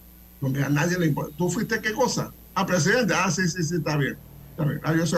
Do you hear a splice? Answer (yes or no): no